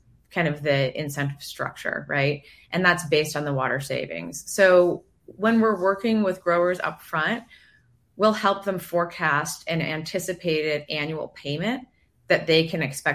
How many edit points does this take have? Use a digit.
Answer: 0